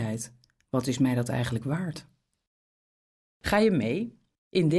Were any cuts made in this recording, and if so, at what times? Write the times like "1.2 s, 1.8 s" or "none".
none